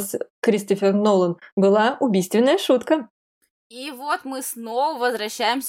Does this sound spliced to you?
no; 0 cuts

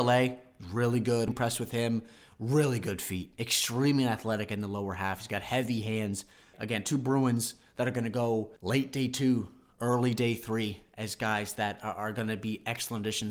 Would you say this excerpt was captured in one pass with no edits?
no; 3 cuts; at 1.3 s, 6.5 s, 8.6 s

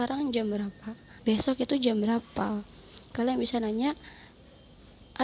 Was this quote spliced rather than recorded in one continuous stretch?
yes; 1 cut; at 1.2 s

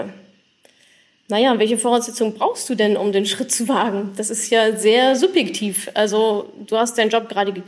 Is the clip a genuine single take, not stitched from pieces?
yes; 0 cuts

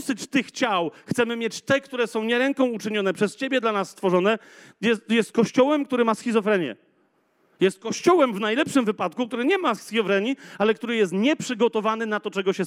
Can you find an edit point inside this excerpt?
no; 0 cuts

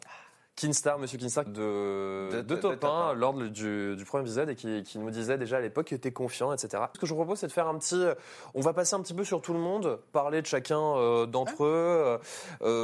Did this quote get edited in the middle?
yes; 2 cuts; at 1.5 s, 6.9 s

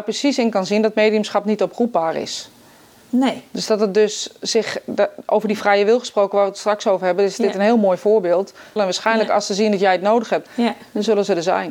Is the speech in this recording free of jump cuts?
no; 2 cuts; at 8.8 s, 10.5 s

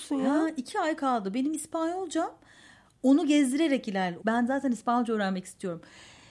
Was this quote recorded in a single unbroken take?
no; 1 cut; at 4.2 s

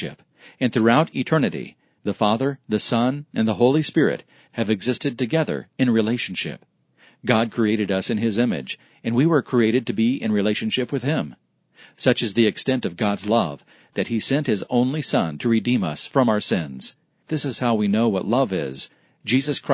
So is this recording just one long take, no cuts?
yes; 0 cuts

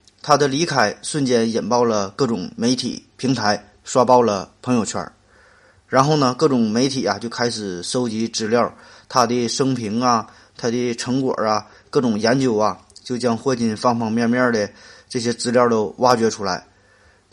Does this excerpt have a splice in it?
no; 0 cuts

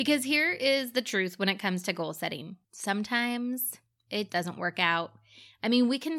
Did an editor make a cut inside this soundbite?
yes; 2 cuts; at 2.6 s, 4.3 s

